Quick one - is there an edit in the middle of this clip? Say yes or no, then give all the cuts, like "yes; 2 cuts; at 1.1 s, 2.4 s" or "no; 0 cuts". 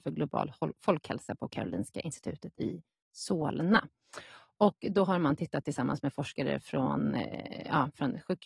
no; 0 cuts